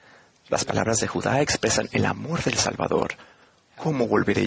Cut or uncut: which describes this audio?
uncut